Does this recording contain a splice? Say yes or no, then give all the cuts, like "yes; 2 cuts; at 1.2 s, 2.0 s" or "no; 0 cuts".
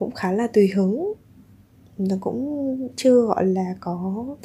no; 0 cuts